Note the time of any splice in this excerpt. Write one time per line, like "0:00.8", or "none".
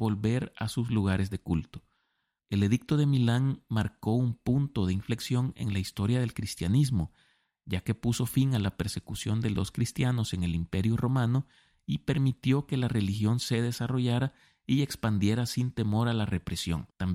0:02.4